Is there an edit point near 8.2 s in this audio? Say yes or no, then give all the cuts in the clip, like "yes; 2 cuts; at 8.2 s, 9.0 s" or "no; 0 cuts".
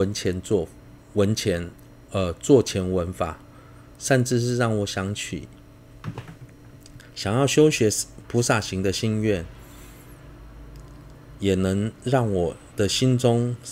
yes; 1 cut; at 8.2 s